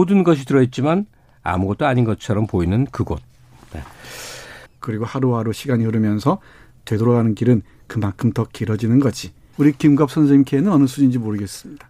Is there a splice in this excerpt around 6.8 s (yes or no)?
no